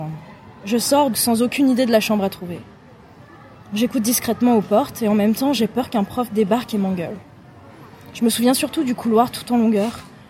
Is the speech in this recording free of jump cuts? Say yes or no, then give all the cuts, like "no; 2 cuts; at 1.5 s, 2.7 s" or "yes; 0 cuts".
no; 1 cut; at 1.1 s